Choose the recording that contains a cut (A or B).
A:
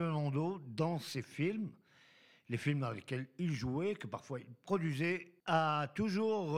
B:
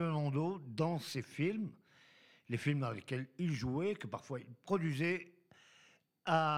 A